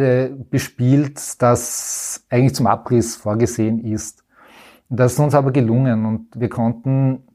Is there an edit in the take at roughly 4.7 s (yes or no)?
no